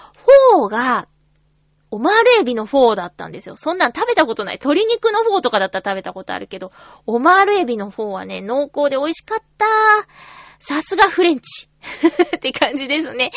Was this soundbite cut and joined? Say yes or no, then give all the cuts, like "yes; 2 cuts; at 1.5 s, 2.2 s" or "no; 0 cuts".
no; 0 cuts